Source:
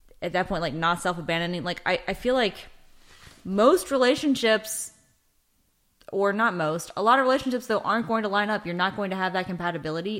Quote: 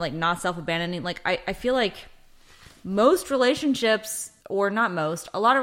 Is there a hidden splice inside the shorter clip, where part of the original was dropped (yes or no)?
yes